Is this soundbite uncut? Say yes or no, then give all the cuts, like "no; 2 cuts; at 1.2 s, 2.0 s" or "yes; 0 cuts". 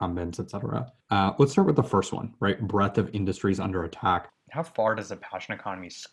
no; 1 cut; at 1.0 s